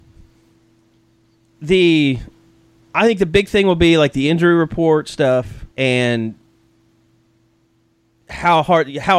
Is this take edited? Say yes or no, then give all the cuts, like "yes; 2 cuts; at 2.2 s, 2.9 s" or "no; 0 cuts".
yes; 1 cut; at 5.7 s